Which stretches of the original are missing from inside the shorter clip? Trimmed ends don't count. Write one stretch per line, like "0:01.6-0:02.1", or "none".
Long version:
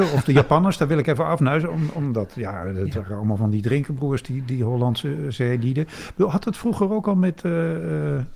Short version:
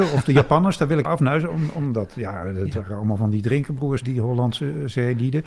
0:01.0-0:01.2
0:04.2-0:04.4